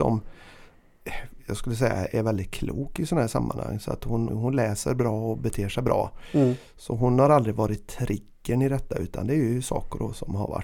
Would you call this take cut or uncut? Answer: cut